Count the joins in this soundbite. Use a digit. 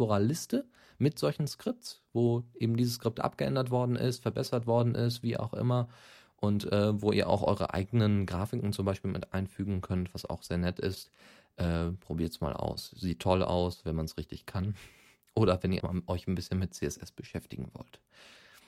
1